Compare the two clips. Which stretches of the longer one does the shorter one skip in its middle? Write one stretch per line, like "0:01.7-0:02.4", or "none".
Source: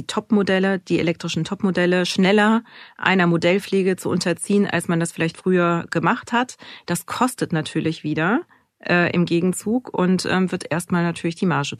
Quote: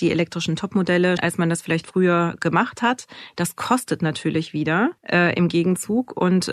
0:02.1-0:04.7
0:08.5-0:08.8